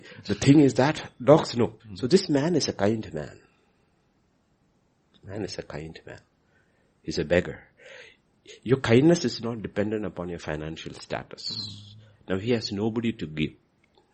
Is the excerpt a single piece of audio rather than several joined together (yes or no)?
no